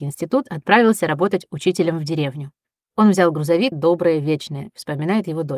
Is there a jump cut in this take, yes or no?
yes